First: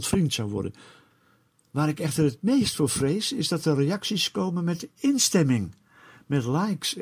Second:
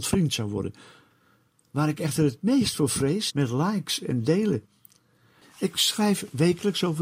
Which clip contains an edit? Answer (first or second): second